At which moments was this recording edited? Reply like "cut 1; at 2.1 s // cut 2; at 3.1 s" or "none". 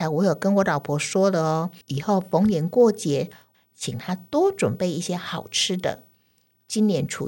cut 1; at 1.8 s // cut 2; at 3.5 s